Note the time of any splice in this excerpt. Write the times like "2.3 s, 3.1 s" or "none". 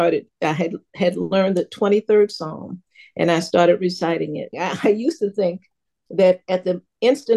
4.5 s